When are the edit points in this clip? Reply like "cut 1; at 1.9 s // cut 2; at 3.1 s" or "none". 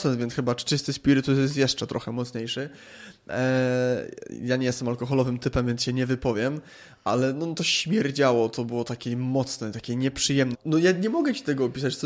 cut 1; at 10.5 s